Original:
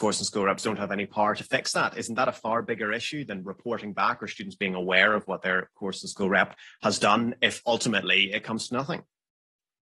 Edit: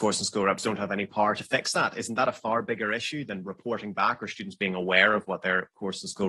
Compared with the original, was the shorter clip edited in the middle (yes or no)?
no